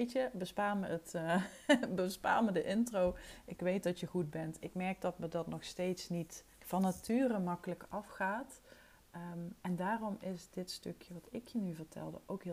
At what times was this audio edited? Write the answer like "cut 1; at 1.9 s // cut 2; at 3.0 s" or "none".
cut 1; at 4.6 s // cut 2; at 6.5 s